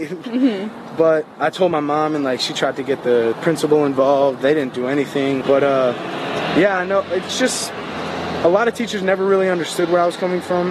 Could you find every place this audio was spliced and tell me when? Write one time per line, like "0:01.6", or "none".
0:05.4